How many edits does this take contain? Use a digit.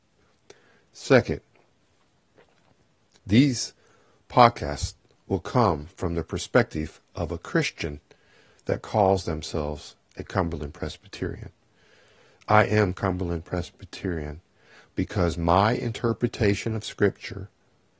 0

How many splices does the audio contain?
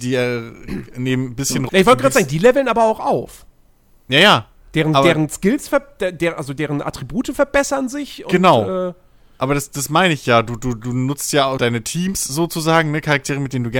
2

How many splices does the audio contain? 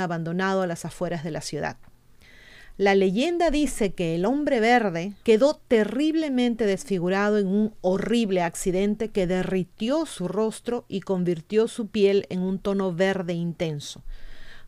1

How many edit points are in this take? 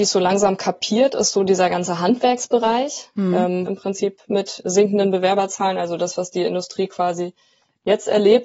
1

